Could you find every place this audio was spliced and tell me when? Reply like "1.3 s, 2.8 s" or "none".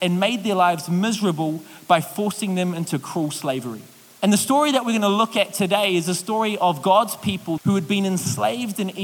4.2 s, 7.6 s